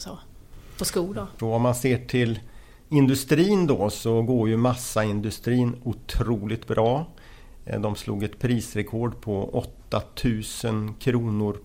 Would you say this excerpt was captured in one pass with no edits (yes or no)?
no